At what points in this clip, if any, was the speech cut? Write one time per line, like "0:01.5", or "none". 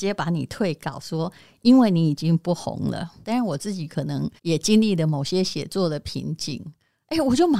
0:03.2
0:04.4